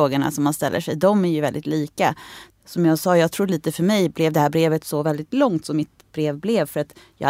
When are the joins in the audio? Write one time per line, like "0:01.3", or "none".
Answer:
0:02.5